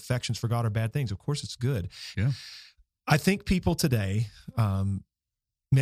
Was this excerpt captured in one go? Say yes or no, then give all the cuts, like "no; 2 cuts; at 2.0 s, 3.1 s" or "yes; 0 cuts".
no; 1 cut; at 2.1 s